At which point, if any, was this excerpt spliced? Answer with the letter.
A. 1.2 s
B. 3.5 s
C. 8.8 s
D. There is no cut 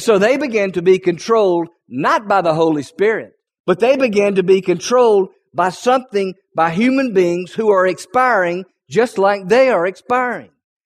B